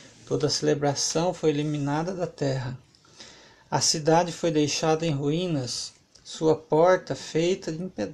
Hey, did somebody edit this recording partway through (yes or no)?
no